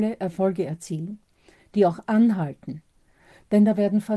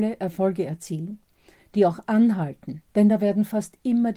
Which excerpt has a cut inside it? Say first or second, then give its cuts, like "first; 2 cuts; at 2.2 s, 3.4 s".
second; 1 cut; at 2.9 s